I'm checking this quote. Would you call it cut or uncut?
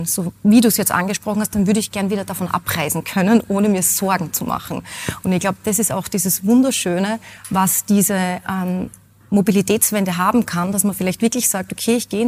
uncut